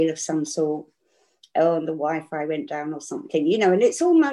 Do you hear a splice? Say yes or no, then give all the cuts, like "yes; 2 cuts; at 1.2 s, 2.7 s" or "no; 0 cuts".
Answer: no; 0 cuts